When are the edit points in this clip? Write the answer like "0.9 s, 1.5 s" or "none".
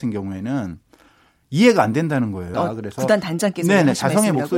2.5 s